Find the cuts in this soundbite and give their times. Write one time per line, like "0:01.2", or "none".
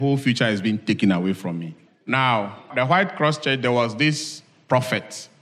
0:01.9